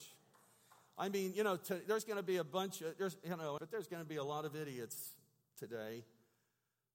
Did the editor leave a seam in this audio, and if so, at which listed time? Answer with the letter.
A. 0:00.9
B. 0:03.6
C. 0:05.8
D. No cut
B